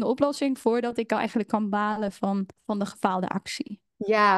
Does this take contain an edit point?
yes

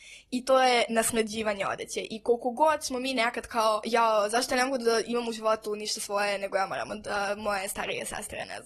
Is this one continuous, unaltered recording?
no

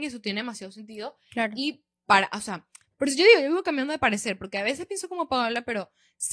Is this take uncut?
yes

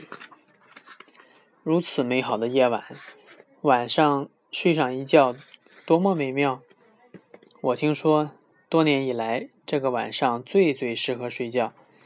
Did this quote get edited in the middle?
no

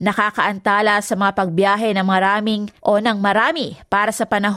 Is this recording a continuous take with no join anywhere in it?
no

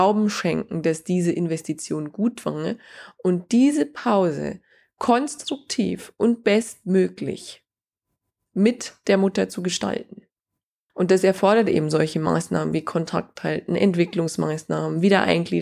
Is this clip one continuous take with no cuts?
yes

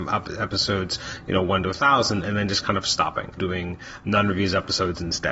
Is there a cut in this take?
yes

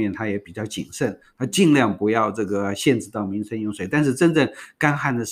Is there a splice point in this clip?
no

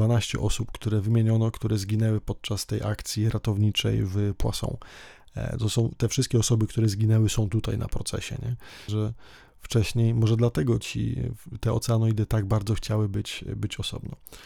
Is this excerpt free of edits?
no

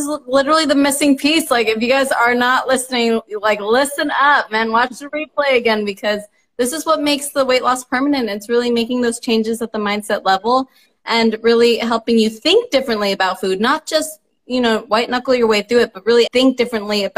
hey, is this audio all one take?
no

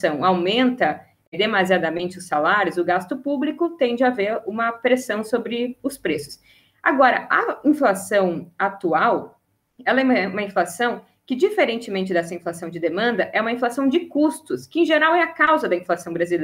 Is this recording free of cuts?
yes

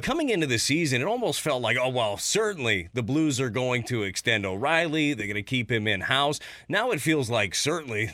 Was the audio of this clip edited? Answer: no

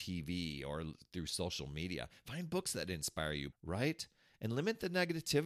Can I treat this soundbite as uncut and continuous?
no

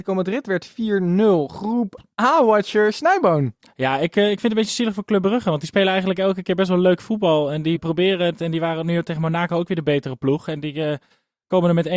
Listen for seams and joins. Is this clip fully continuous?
no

